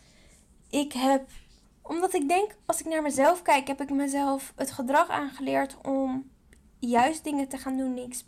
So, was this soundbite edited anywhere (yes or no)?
yes